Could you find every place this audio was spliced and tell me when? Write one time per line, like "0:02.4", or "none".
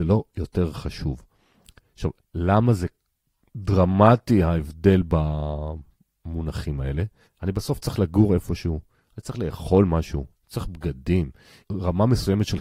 0:07.2
0:11.6